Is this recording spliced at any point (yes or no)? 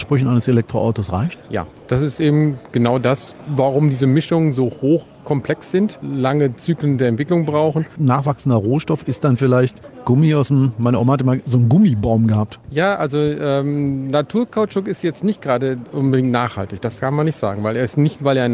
yes